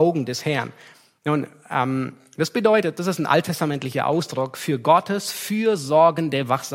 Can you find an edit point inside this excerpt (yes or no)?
no